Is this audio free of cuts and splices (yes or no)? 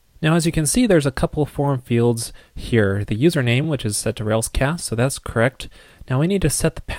yes